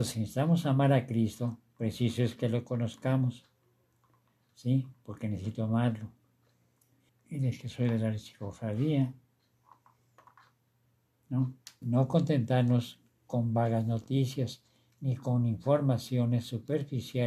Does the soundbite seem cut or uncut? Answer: cut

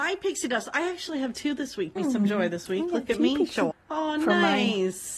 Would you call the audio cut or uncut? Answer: cut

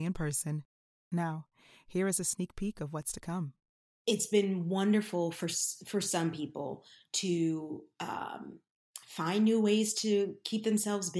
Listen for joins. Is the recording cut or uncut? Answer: cut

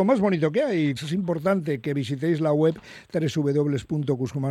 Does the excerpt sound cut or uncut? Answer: cut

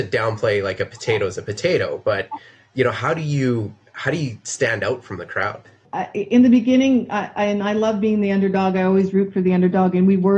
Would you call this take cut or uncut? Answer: uncut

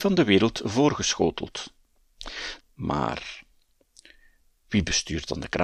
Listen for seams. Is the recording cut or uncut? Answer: cut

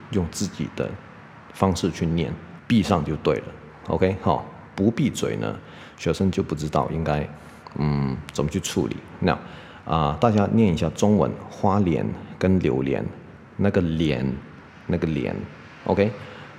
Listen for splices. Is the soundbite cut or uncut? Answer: cut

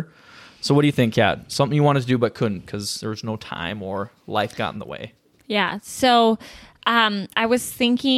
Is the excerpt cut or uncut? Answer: uncut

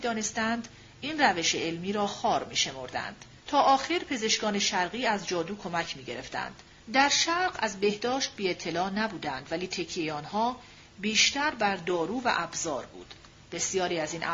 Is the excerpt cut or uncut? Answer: cut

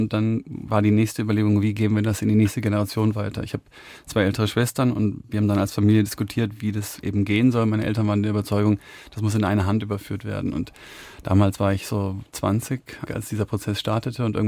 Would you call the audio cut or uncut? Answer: cut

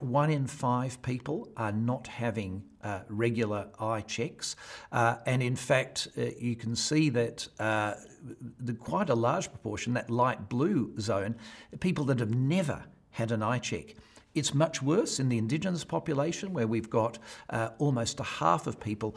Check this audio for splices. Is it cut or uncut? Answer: uncut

